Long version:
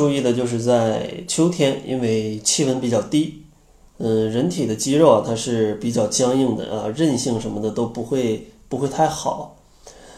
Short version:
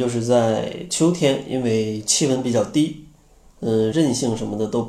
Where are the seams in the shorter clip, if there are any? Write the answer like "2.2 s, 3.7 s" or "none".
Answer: 3.9 s